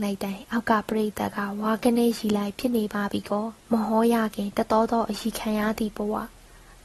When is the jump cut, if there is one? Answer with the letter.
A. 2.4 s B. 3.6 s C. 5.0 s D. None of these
B